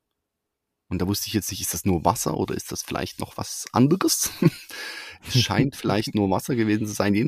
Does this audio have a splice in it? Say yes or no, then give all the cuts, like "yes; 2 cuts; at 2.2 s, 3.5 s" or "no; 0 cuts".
no; 0 cuts